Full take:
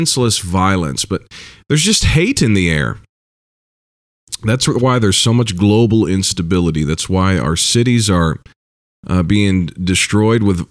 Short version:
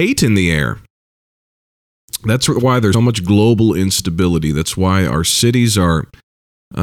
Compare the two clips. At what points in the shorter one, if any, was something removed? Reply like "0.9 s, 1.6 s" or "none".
2.9 s